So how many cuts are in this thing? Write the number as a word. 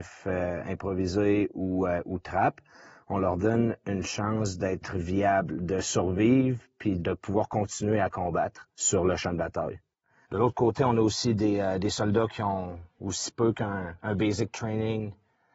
one